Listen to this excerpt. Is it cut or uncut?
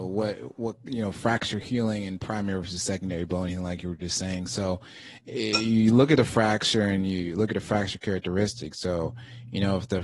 uncut